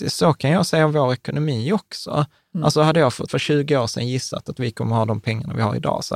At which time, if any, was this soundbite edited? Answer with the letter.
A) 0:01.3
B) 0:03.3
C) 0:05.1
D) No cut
B